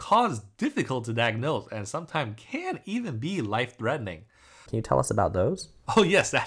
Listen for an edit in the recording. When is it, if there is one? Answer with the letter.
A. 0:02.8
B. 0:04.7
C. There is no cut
B